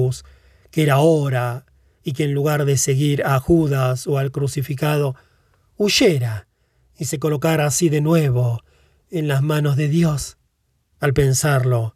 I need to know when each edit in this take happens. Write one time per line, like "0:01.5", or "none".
0:10.9